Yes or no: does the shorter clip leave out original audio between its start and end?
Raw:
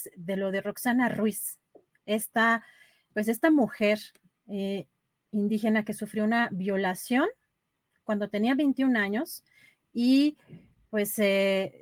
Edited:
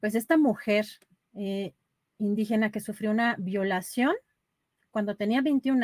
no